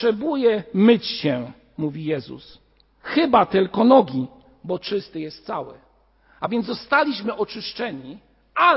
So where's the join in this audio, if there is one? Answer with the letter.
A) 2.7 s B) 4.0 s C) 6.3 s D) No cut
D